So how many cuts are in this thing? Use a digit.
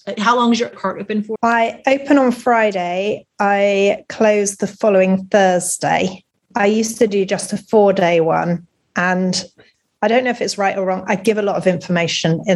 1